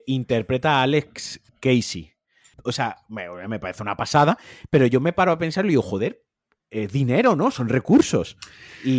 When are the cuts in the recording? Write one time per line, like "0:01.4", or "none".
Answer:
0:02.5